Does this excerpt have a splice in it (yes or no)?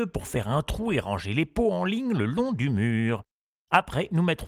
no